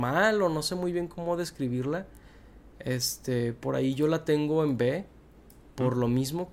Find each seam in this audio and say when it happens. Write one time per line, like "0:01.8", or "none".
none